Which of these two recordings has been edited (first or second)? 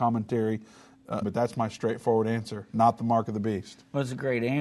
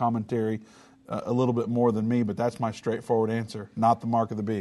first